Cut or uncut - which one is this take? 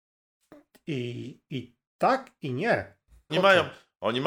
cut